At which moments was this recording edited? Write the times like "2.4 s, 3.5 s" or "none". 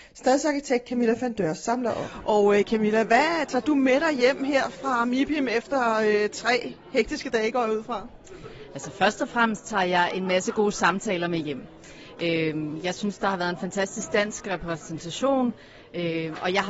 none

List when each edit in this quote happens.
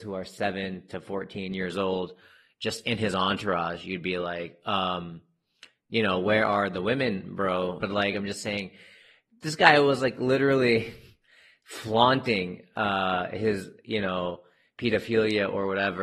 7.8 s

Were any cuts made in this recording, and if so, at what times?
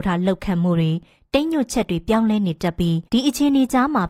3.1 s

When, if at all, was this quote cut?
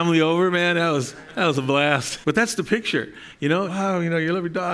2.2 s, 3.7 s

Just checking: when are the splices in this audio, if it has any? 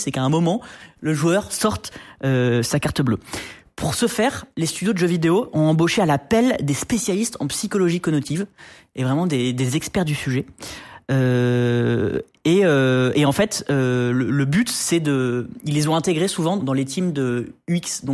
16.6 s

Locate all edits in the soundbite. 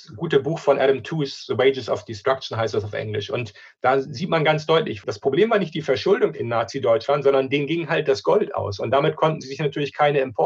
6.3 s

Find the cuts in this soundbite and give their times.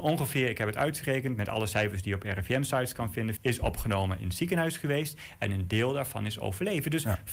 3.4 s

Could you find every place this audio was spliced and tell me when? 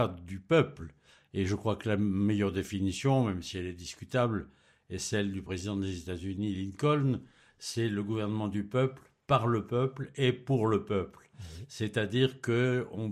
none

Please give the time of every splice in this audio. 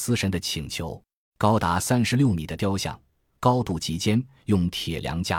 1.3 s, 3.3 s

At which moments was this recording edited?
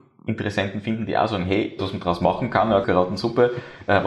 1.8 s, 2.8 s

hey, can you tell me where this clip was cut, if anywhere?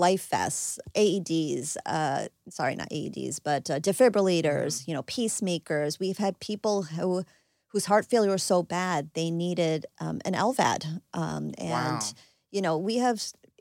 0.9 s

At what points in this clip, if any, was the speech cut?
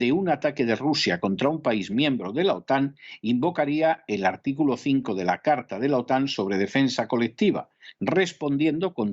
none

